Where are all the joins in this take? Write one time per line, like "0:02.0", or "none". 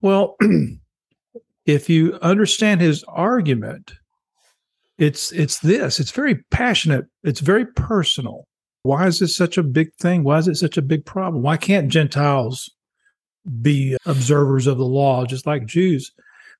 0:08.8
0:14.0